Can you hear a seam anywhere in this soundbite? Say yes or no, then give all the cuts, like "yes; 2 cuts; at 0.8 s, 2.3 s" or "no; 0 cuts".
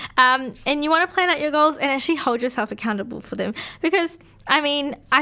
no; 0 cuts